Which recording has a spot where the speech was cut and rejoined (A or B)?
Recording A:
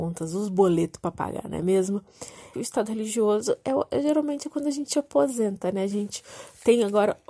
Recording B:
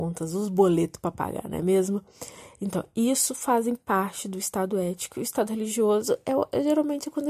A